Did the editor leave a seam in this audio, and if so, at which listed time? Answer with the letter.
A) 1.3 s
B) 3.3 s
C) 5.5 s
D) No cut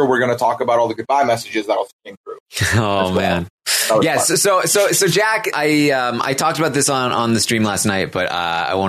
C